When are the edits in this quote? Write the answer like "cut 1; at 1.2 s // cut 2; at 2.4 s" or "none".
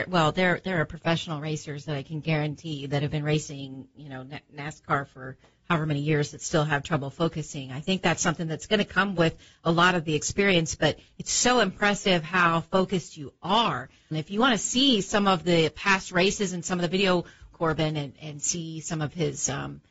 cut 1; at 14.1 s // cut 2; at 17.5 s